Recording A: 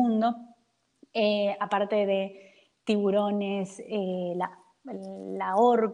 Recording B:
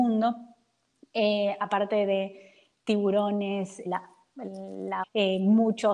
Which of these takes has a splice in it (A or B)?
B